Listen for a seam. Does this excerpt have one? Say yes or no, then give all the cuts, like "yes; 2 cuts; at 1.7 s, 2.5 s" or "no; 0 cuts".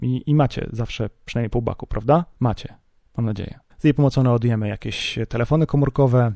yes; 2 cuts; at 2.4 s, 3.7 s